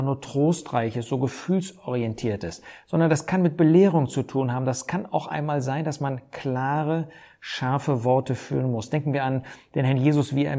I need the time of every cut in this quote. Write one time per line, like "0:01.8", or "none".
none